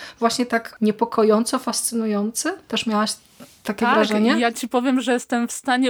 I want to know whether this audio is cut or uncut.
uncut